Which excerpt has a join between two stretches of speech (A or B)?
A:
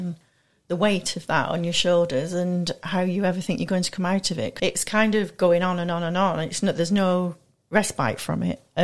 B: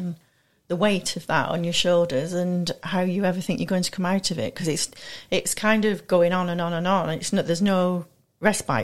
A